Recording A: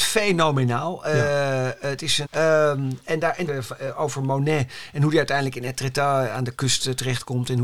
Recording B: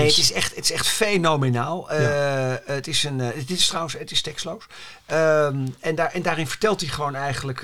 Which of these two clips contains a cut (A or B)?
A